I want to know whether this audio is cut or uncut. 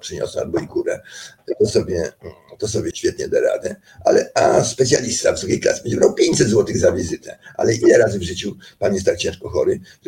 cut